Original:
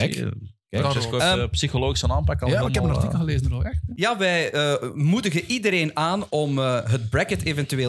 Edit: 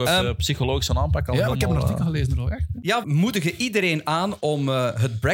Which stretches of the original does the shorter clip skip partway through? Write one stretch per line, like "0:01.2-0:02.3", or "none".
0:04.2-0:04.9